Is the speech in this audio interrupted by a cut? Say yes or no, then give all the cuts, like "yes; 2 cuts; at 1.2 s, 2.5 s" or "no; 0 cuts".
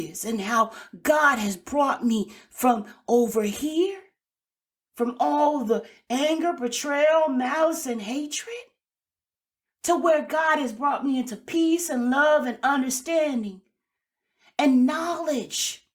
no; 0 cuts